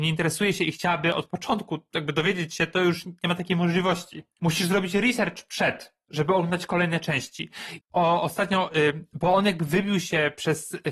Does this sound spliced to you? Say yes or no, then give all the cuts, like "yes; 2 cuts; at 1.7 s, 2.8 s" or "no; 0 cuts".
yes; 1 cut; at 7.8 s